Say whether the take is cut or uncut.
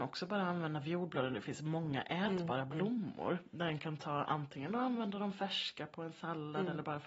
uncut